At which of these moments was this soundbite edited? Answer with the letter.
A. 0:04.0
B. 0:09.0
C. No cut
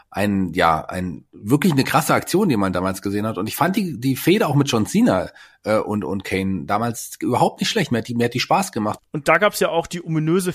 B